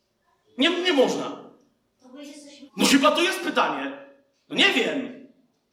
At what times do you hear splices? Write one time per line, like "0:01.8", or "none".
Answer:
0:02.7